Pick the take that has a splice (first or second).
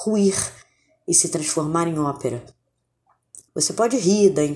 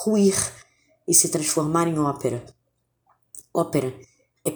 first